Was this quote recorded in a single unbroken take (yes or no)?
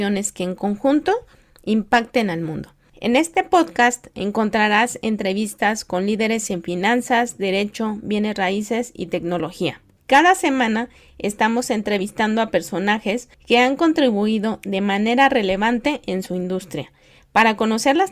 yes